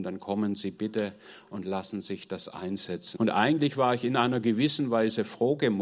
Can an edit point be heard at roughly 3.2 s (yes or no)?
yes